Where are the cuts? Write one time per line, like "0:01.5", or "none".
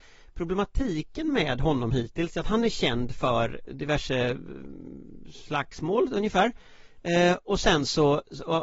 0:03.7